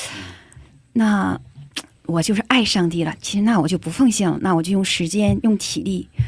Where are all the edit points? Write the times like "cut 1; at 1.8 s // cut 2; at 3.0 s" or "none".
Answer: cut 1; at 4.4 s